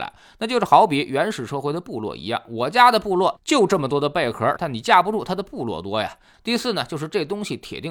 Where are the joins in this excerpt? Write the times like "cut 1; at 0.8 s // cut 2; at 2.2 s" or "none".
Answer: cut 1; at 4.6 s // cut 2; at 6.3 s